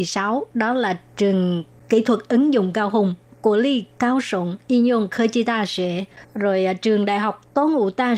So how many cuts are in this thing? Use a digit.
1